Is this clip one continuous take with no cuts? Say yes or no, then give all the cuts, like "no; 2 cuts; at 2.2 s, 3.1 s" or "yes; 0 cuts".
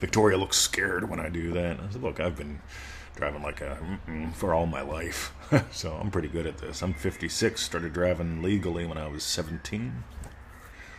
yes; 0 cuts